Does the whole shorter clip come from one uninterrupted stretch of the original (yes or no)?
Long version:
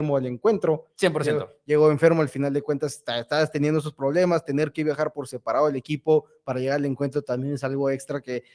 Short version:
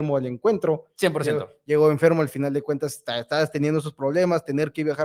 yes